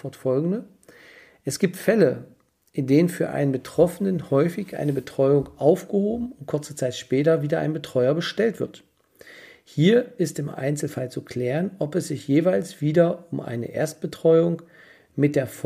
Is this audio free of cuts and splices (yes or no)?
yes